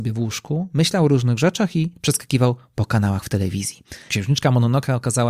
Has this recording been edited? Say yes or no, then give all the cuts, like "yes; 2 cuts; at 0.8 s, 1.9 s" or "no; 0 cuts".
yes; 1 cut; at 4.1 s